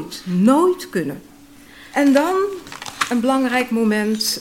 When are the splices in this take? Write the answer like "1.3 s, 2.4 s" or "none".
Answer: 1.9 s

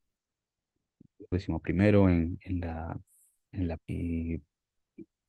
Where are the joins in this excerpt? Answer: 1.3 s, 3.8 s

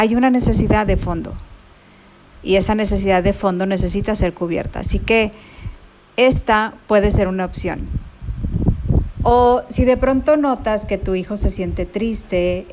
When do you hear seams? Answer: 9.2 s

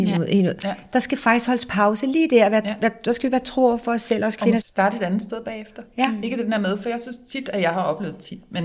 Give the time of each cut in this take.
4.6 s

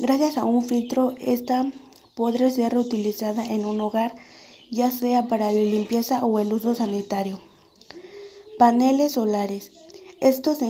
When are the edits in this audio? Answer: none

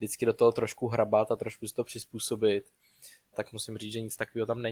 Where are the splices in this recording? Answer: 3.3 s

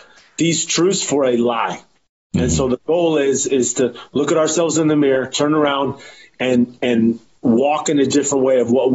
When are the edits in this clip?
none

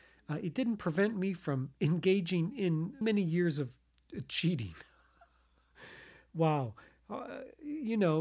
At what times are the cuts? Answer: 3.0 s

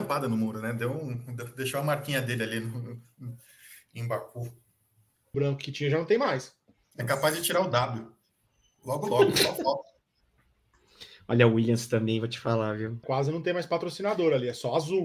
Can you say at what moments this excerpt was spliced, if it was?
5.3 s, 13.0 s

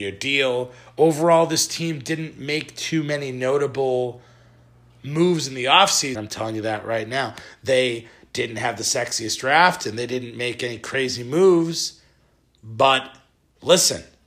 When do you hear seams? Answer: 6.1 s

